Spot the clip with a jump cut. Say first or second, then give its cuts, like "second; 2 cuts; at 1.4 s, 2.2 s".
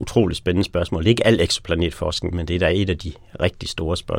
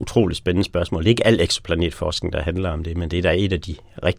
first; 1 cut; at 2.3 s